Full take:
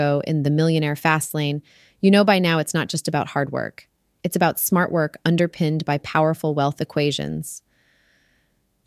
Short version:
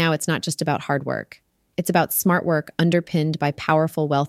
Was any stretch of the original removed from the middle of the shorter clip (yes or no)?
no